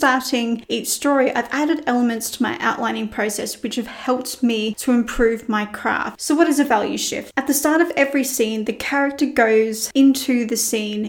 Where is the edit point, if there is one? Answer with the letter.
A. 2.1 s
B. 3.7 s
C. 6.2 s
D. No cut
C